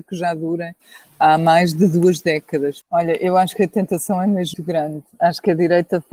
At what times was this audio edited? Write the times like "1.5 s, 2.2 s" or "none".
2.8 s, 4.5 s